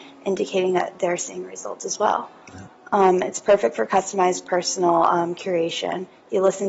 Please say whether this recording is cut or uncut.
uncut